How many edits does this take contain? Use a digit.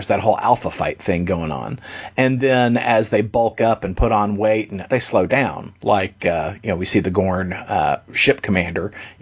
1